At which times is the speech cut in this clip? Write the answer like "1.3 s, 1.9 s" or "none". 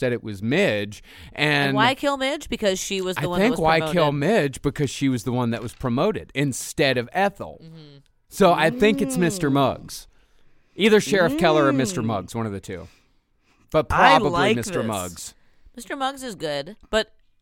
none

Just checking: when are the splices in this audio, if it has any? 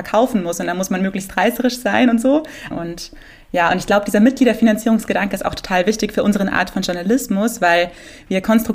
2.7 s

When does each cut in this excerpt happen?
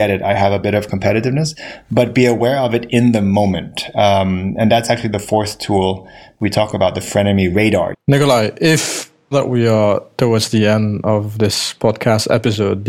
7.9 s, 9.3 s

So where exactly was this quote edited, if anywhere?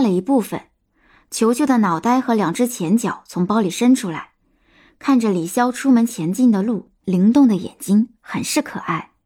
7.0 s

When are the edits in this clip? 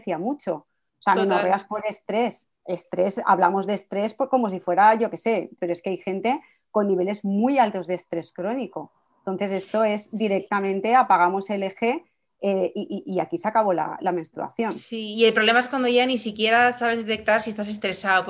2.6 s, 5.6 s

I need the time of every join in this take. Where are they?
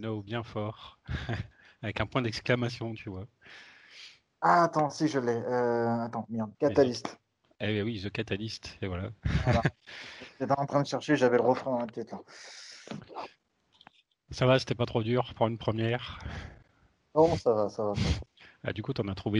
6.5 s

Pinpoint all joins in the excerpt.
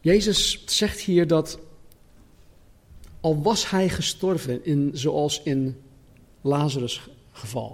none

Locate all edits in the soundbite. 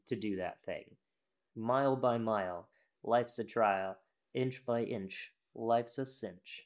1.5 s

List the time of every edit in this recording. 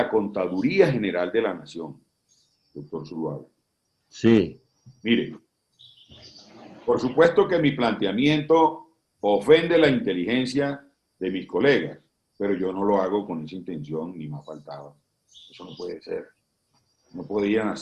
none

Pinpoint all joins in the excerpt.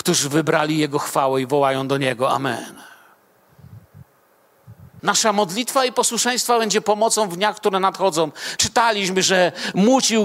5.0 s, 8.6 s

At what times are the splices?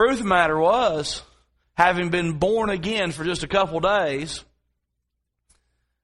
1.6 s

